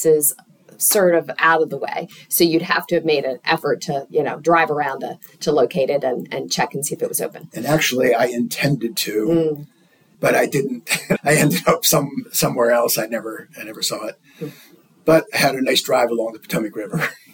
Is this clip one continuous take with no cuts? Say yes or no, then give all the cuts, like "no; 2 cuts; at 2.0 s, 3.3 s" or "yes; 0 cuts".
no; 2 cuts; at 10.1 s, 11.2 s